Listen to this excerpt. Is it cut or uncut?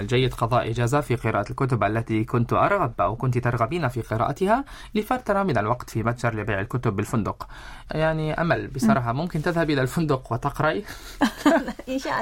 cut